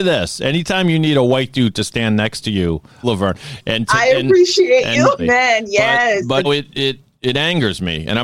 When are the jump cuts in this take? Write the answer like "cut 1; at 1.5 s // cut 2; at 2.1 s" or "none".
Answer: cut 1; at 3.0 s // cut 2; at 5.2 s // cut 3; at 6.4 s

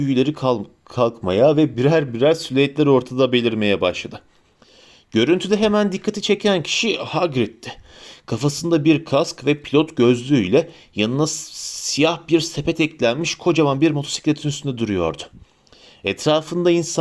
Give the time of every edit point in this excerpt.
none

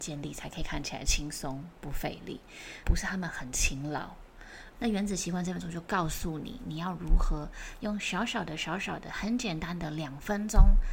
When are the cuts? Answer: cut 1; at 2.8 s // cut 2; at 4.8 s

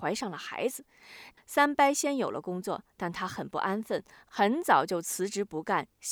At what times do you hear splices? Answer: cut 1; at 1.4 s

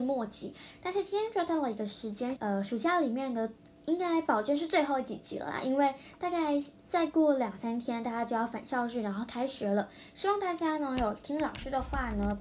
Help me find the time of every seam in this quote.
cut 1; at 2.4 s

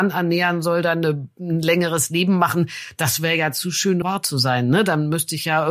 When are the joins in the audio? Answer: cut 1; at 4.0 s

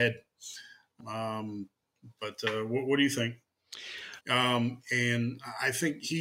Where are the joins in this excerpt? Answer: cut 1; at 1.0 s // cut 2; at 4.2 s

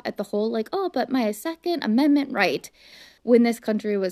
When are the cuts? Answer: cut 1; at 3.2 s

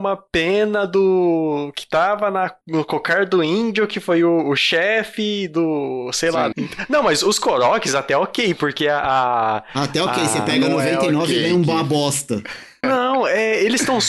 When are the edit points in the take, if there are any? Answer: cut 1; at 6.5 s // cut 2; at 12.8 s

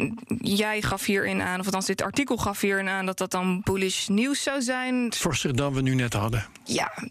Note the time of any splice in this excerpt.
cut 1; at 5.1 s

